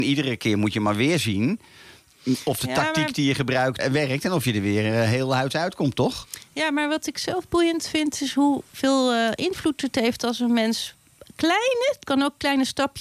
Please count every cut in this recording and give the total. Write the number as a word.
one